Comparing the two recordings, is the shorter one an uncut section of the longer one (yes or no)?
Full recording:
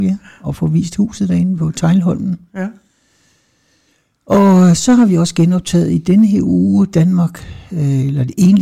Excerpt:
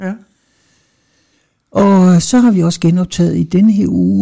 yes